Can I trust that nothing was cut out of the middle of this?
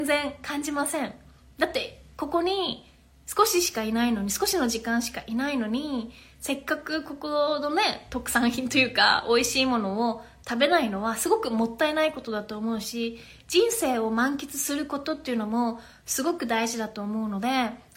yes; 0 cuts

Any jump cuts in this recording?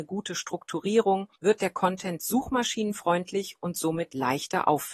yes; 1 cut; at 1.4 s

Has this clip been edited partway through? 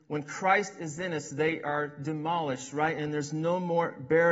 no; 0 cuts

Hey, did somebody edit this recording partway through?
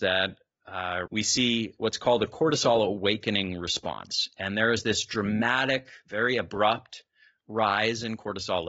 yes; 1 cut; at 1.1 s

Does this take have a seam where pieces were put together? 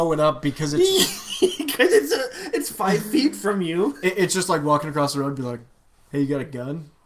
no; 0 cuts

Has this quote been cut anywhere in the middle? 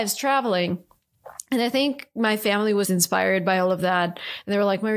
yes; 1 cut; at 2.8 s

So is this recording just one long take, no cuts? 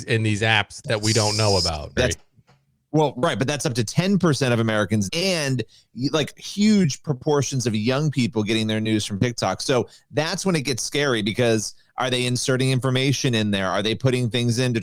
no; 2 cuts; at 2.0 s, 5.1 s

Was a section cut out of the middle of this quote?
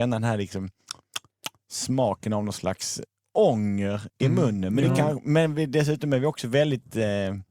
no; 0 cuts

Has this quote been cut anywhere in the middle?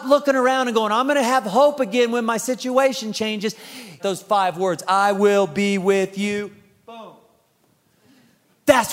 yes; 1 cut; at 4.0 s

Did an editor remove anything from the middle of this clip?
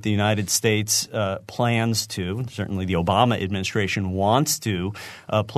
no; 0 cuts

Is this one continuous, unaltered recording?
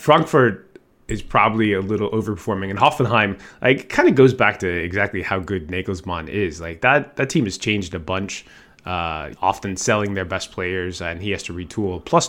no; 1 cut; at 9.3 s

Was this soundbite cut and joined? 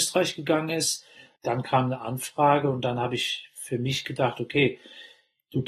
no; 0 cuts

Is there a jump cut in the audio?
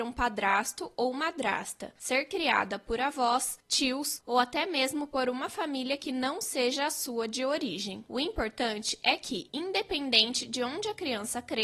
no; 0 cuts

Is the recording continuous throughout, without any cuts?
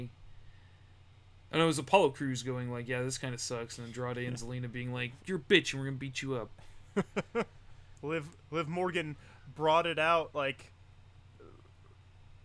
no; 2 cuts; at 5.2 s, 8.0 s

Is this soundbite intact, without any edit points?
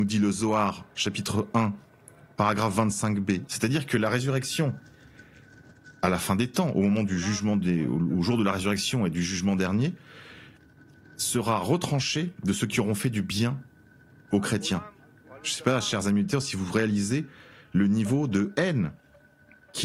no; 1 cut; at 3.5 s

